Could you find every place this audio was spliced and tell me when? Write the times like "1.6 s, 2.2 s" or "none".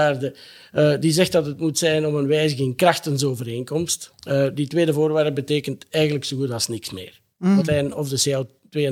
4.1 s, 7.6 s

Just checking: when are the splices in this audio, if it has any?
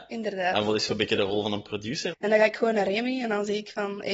2.1 s

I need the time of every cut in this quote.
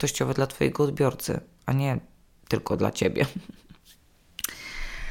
none

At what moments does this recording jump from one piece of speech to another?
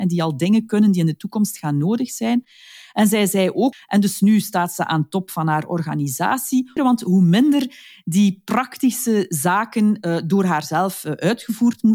3.7 s, 6.8 s

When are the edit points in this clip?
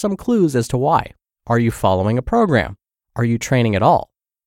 1.3 s, 2.9 s

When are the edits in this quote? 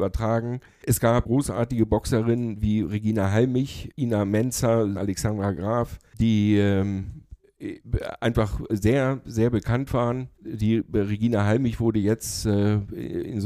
4.9 s, 8.7 s

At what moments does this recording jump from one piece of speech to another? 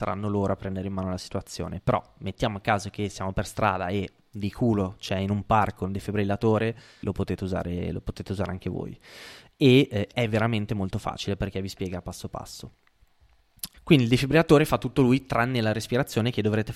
7.0 s, 13.7 s

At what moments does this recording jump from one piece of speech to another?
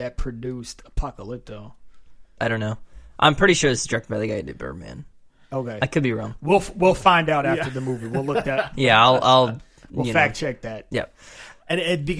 2.4 s

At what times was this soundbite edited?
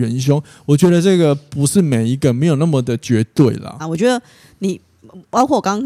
3.8 s

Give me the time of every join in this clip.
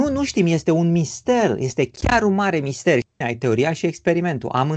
3.2 s

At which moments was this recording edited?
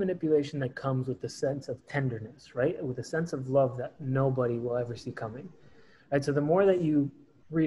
none

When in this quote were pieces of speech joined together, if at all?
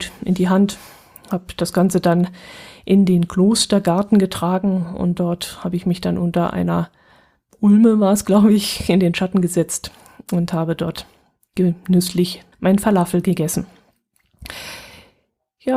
12.5 s

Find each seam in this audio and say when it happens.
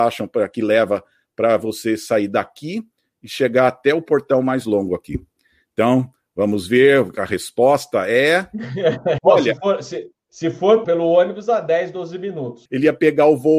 9.2 s, 10.8 s, 12.7 s

